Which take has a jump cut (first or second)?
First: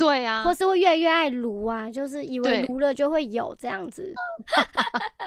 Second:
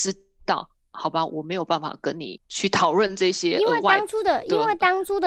first